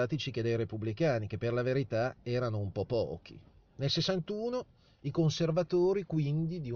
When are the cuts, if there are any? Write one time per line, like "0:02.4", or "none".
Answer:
0:03.7